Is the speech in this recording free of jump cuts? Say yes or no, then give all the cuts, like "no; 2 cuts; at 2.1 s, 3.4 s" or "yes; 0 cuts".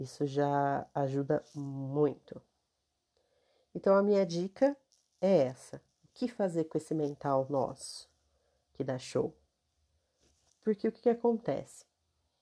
no; 1 cut; at 10.5 s